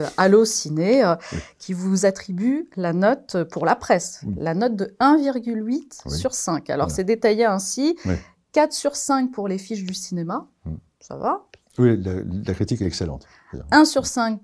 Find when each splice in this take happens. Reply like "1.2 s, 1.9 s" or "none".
none